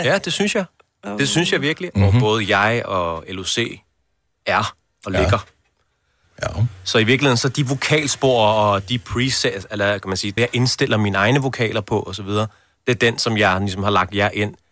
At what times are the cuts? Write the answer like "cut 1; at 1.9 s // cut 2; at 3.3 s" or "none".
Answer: cut 1; at 1.9 s // cut 2; at 6.2 s // cut 3; at 10.4 s

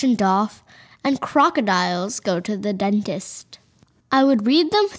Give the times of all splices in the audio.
cut 1; at 4.0 s

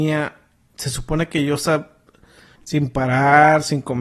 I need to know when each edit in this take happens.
cut 1; at 2.6 s

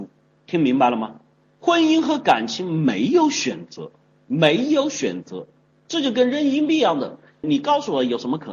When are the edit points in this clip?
cut 1; at 5.7 s // cut 2; at 7.4 s

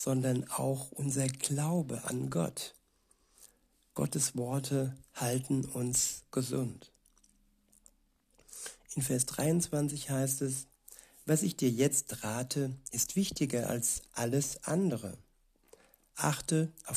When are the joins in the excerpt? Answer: none

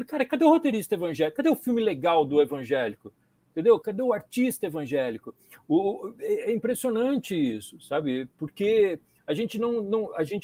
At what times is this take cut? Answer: cut 1; at 3.8 s

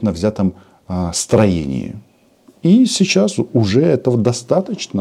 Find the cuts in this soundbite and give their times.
none

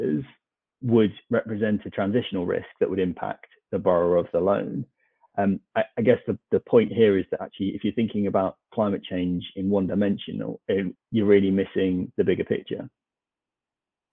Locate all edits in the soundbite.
cut 1; at 11.0 s

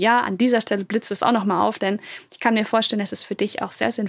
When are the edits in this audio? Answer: none

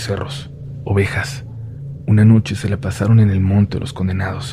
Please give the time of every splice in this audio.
none

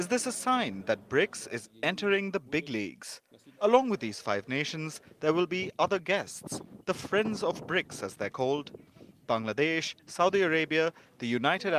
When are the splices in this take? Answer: cut 1; at 3.6 s

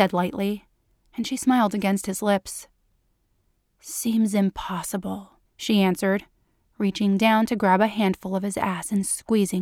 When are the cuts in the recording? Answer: cut 1; at 5.5 s

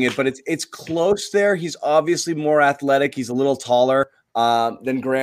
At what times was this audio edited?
none

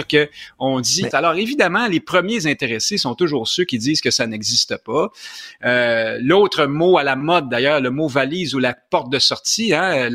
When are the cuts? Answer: cut 1; at 1.1 s

